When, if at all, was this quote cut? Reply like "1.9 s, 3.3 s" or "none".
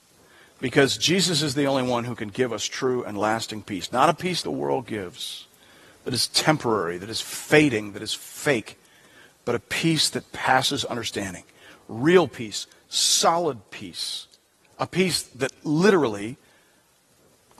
4.4 s